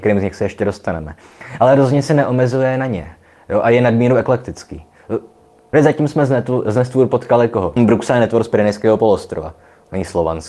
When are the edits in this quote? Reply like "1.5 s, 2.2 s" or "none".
5.7 s, 7.8 s